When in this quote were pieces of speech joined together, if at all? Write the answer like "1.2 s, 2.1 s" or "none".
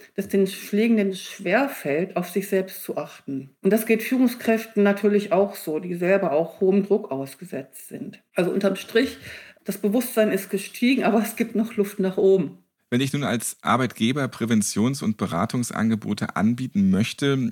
none